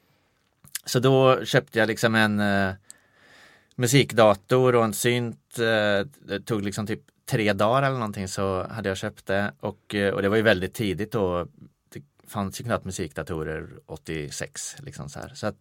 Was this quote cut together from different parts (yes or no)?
no